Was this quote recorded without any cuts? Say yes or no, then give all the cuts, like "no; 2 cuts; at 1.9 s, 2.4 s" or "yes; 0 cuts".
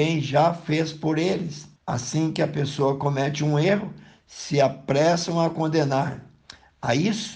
no; 1 cut; at 1.8 s